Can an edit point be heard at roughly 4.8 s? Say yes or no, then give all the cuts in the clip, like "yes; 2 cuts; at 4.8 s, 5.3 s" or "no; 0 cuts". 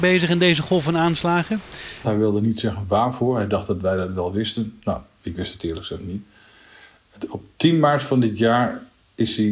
no; 1 cut; at 2.0 s